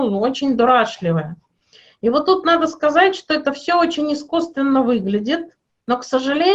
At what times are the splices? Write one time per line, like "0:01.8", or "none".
none